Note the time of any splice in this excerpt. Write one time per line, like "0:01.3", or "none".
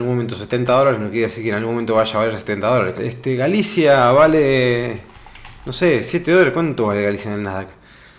0:02.9